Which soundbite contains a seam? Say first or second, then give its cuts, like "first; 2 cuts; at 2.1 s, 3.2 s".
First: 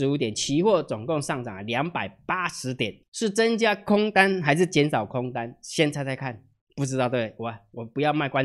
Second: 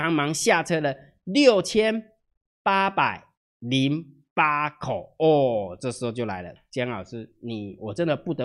first; 1 cut; at 3.0 s